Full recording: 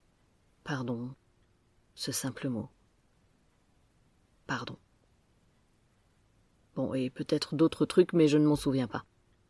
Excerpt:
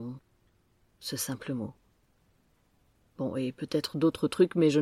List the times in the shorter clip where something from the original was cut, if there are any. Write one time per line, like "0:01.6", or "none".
0:03.0